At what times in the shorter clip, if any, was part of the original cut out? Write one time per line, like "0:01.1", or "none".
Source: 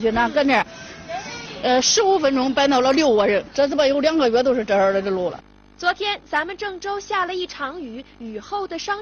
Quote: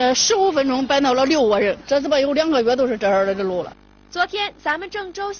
none